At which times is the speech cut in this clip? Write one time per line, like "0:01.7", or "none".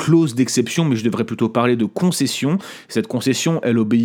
none